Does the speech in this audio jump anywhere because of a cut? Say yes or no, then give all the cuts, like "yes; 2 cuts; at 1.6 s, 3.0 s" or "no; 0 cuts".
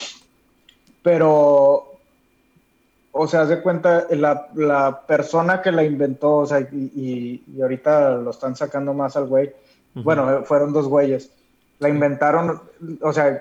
no; 0 cuts